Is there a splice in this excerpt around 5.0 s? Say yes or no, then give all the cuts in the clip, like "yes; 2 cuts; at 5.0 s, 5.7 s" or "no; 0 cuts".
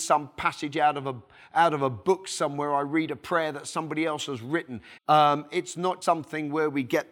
yes; 2 cuts; at 5.0 s, 6.0 s